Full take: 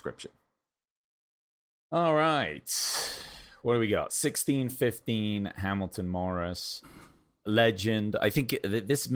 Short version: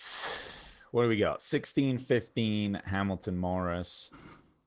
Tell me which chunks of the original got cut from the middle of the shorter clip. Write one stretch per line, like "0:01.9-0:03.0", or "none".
none